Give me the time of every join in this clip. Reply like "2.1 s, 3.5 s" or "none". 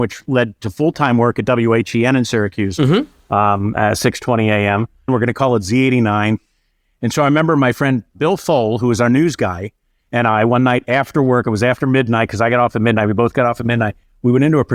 5.1 s